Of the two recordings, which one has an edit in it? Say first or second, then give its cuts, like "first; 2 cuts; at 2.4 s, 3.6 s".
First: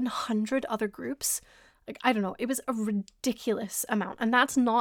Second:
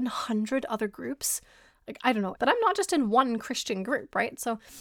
second; 1 cut; at 2.4 s